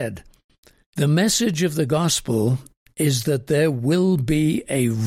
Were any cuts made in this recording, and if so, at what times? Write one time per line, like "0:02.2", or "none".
0:00.9